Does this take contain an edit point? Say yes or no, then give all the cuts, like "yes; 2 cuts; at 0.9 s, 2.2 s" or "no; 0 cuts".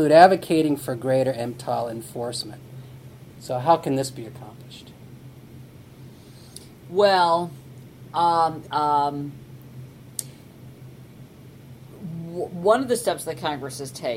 yes; 1 cut; at 8.6 s